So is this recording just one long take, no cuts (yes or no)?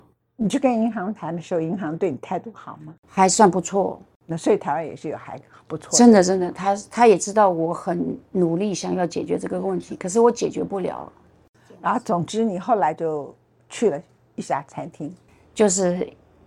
yes